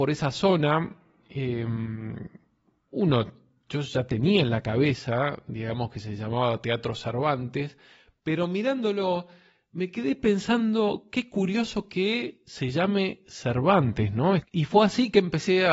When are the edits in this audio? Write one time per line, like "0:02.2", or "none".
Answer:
0:14.4